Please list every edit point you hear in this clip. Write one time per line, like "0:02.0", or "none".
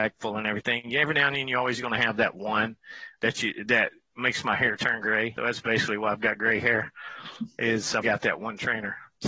0:05.4
0:08.0